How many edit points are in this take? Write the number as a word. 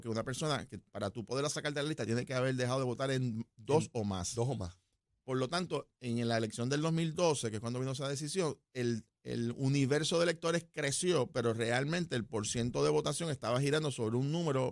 zero